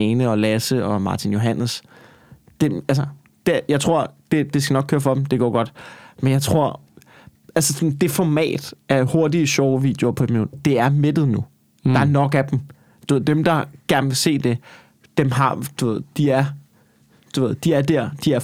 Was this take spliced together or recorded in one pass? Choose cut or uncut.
uncut